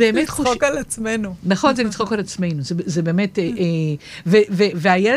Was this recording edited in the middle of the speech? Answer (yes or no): no